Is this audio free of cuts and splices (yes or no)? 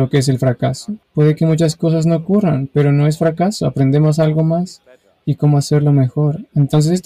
no